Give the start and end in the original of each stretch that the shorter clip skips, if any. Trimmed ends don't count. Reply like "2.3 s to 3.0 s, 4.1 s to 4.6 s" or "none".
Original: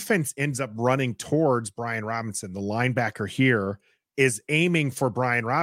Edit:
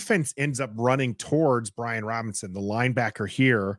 none

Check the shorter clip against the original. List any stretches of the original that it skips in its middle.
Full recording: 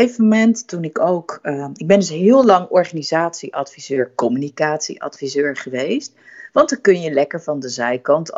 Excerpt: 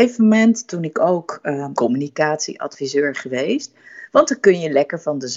1.7 s to 4.2 s

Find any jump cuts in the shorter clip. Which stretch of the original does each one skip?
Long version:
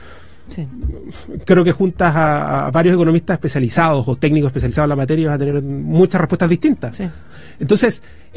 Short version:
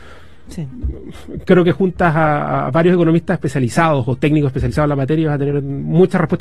none

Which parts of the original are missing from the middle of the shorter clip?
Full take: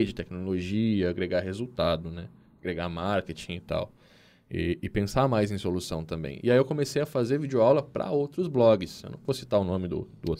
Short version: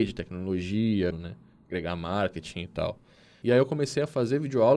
1.1 s to 2.0 s, 4.3 s to 6.4 s

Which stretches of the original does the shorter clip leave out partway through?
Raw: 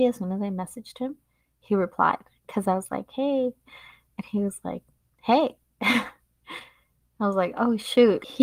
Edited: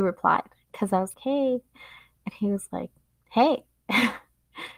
2.9 s to 3.1 s

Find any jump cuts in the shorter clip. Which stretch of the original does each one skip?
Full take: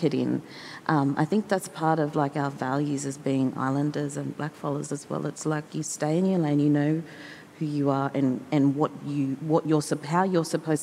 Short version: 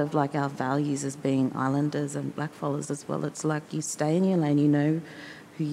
none

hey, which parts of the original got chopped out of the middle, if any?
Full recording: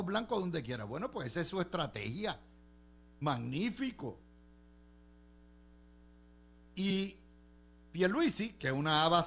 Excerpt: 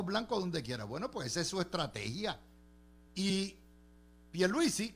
3.1 s to 6.7 s

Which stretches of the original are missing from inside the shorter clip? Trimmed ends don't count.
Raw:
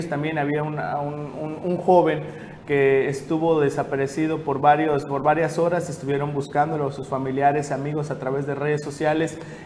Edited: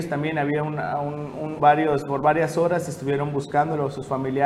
1.6 s to 4.6 s

